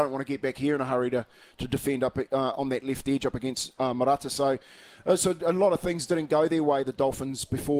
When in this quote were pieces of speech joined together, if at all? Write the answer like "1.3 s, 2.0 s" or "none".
none